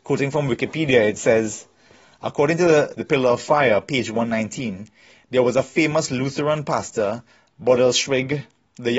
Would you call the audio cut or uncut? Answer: cut